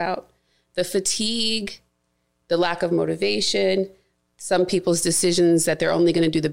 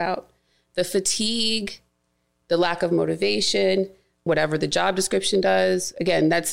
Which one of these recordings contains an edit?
second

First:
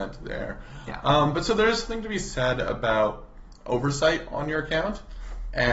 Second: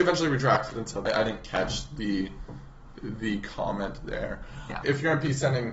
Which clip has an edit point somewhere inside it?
second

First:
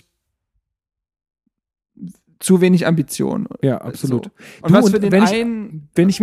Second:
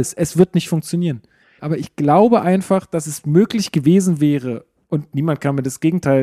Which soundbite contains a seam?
second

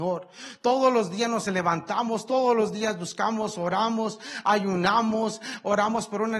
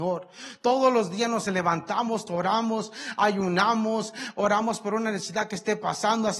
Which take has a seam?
second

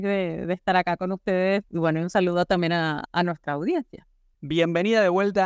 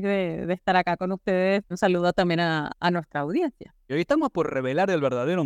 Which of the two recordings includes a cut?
second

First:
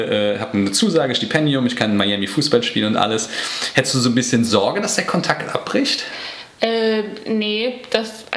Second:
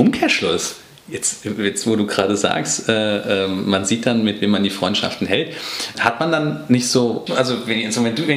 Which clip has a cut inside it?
second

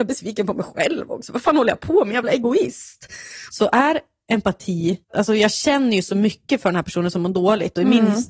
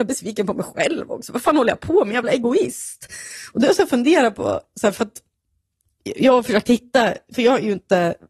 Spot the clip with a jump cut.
first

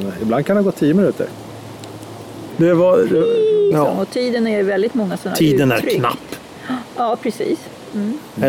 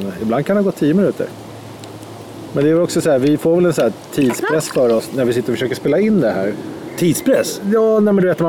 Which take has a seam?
first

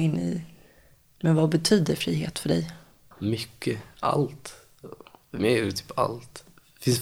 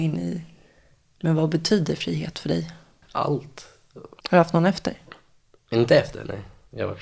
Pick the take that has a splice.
second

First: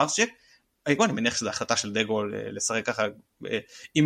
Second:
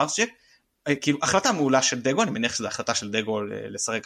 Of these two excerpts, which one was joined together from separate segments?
first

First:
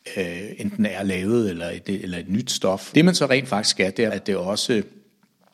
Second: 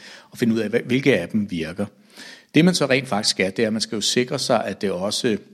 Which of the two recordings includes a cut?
first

